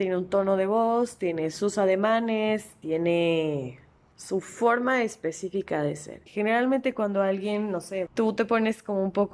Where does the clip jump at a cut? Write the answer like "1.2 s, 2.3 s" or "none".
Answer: 6.3 s, 8.1 s